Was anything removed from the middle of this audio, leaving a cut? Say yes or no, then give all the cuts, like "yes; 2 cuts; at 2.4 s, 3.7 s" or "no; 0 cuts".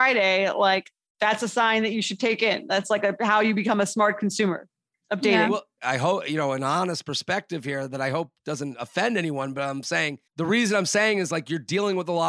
yes; 2 cuts; at 5.8 s, 10.3 s